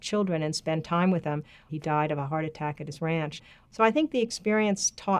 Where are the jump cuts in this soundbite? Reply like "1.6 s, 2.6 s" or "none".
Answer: 1.7 s